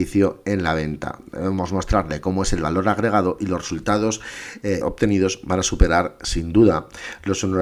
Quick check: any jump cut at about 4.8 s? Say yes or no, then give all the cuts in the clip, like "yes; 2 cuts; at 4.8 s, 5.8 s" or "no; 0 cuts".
yes; 1 cut; at 4.8 s